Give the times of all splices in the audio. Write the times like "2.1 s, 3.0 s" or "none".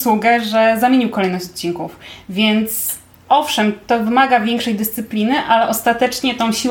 none